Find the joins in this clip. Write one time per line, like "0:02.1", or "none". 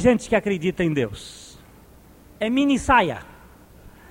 0:02.4